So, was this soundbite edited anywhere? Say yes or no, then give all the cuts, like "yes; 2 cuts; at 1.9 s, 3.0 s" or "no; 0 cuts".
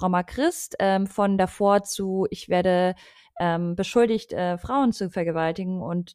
no; 0 cuts